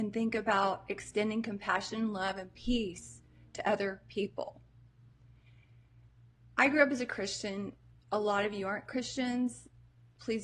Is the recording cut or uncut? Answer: uncut